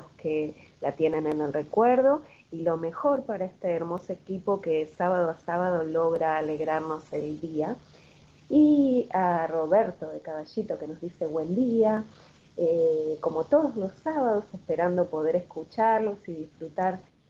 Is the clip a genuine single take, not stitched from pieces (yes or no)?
yes